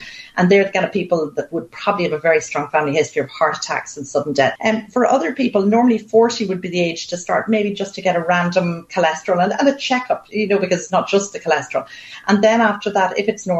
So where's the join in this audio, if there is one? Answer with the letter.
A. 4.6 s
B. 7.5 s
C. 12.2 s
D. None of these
A